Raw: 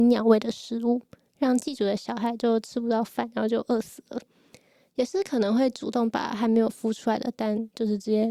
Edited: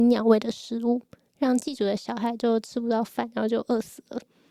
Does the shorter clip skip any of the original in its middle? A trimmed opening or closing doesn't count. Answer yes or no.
no